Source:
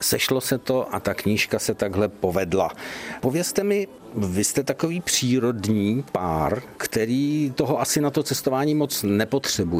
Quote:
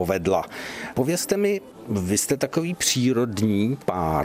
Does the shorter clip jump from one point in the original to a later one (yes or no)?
no